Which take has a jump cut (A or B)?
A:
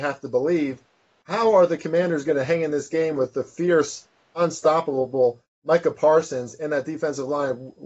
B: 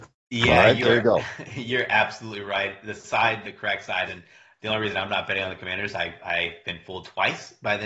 B